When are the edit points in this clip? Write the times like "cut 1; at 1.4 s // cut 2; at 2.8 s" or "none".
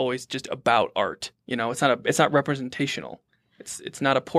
cut 1; at 1.4 s

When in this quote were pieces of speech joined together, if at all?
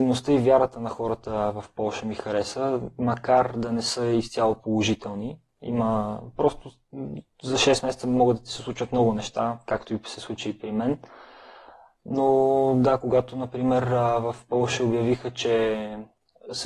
none

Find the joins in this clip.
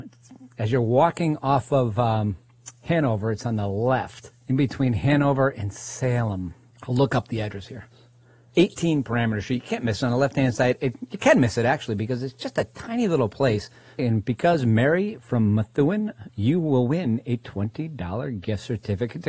cut 1; at 14.0 s // cut 2; at 16.3 s

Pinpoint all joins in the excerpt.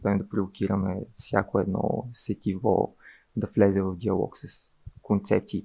none

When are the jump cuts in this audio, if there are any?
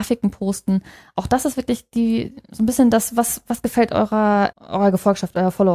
cut 1; at 4.5 s

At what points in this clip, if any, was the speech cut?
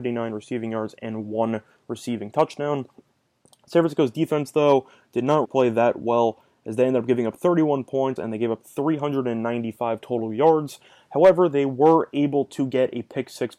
cut 1; at 5.4 s // cut 2; at 8.2 s

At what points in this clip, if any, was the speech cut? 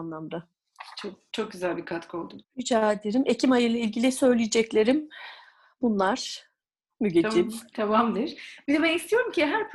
cut 1; at 2.4 s

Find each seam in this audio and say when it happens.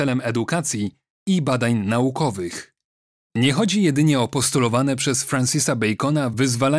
cut 1; at 3.1 s

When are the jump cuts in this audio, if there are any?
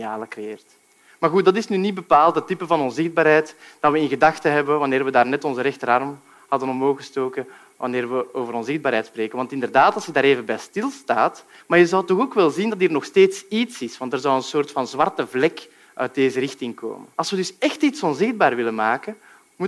cut 1; at 11.6 s // cut 2; at 17.1 s

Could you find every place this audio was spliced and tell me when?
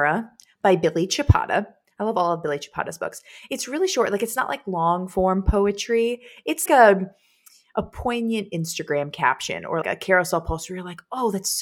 cut 1; at 6.7 s // cut 2; at 9.8 s

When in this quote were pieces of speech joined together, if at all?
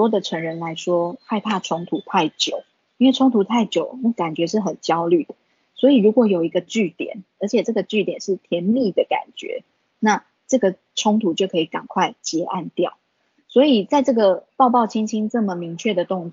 cut 1; at 13.3 s

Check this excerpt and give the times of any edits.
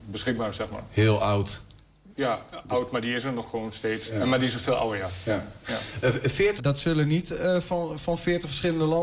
cut 1; at 6.6 s

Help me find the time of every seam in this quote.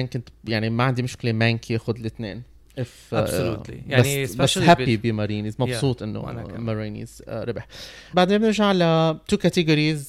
cut 1; at 8.1 s

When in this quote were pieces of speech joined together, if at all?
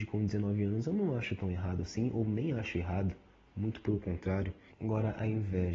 cut 1; at 4.7 s

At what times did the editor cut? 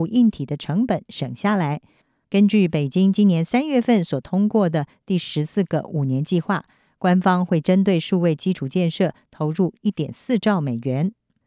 cut 1; at 2.2 s

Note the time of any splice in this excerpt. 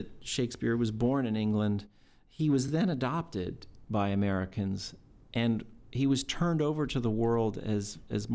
none

